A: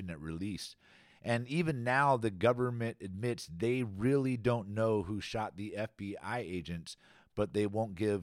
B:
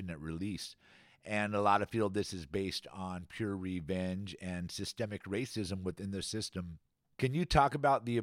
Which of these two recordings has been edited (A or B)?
A